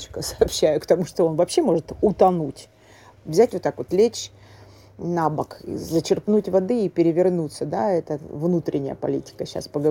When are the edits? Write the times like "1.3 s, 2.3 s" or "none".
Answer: none